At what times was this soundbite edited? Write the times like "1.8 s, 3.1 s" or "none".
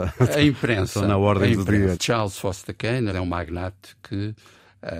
1.9 s, 3.1 s